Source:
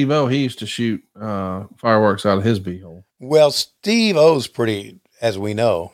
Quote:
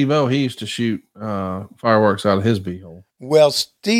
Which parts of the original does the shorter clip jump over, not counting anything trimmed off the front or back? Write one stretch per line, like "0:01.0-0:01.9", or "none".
none